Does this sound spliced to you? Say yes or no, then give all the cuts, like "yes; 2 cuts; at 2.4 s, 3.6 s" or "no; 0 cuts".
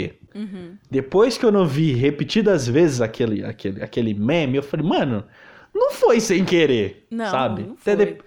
no; 0 cuts